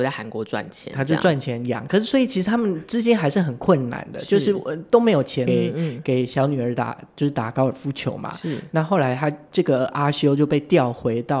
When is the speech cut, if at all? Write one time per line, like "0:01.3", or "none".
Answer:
0:05.5

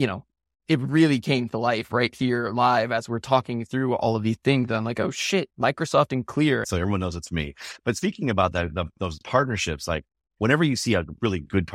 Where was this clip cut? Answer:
0:05.5
0:06.6

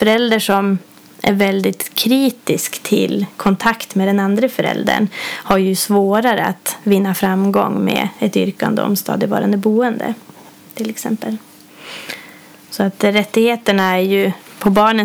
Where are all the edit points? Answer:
none

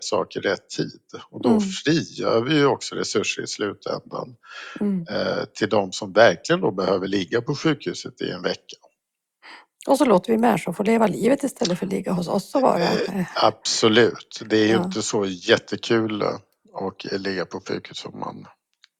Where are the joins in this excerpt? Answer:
none

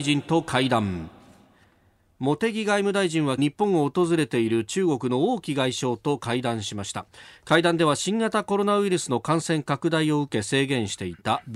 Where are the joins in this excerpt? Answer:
0:03.4

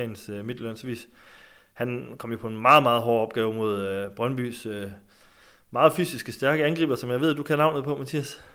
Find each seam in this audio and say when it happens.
none

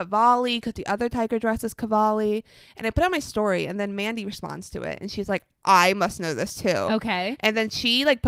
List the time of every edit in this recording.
none

